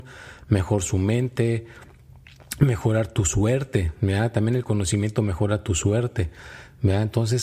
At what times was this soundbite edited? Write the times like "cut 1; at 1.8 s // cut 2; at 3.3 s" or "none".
none